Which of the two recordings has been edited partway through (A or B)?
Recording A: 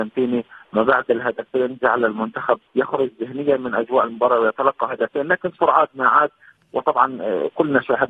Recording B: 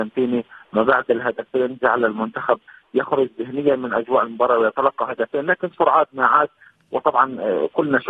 A